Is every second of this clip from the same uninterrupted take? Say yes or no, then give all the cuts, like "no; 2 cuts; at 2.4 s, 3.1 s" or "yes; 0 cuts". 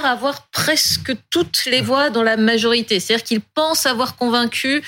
yes; 0 cuts